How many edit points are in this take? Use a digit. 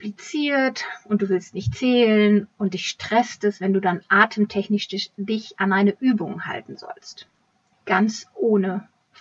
1